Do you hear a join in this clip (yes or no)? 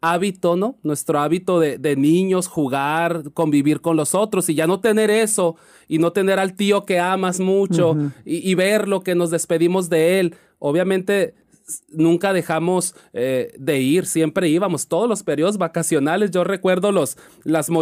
no